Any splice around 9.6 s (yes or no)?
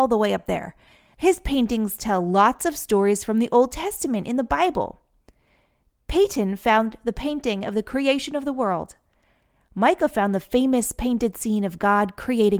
no